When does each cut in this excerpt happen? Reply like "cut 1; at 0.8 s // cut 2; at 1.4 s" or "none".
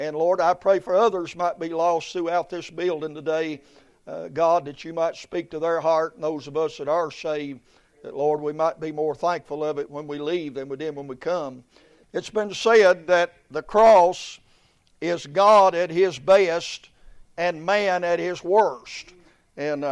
cut 1; at 12.0 s